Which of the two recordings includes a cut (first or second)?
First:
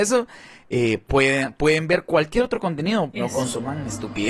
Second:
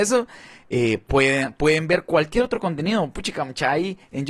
first